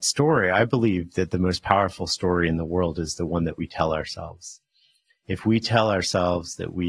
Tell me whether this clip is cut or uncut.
cut